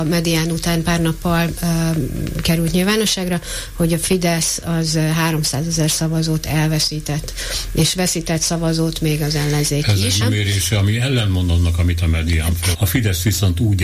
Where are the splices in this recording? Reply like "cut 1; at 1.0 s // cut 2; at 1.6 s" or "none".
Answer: cut 1; at 10.2 s // cut 2; at 12.7 s